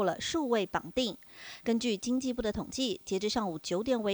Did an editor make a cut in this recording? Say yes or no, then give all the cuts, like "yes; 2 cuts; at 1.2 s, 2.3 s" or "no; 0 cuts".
yes; 1 cut; at 1.6 s